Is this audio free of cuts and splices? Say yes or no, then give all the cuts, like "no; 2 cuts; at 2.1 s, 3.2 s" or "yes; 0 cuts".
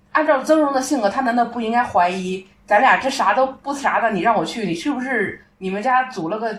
yes; 0 cuts